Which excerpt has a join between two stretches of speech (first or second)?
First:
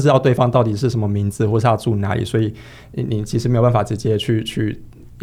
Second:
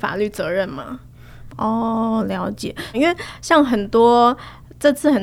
second